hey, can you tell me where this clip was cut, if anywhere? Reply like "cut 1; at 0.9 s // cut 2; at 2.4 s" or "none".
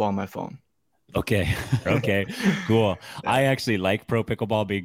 cut 1; at 1.8 s